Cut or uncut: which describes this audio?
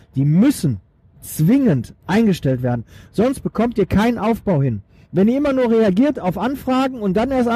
uncut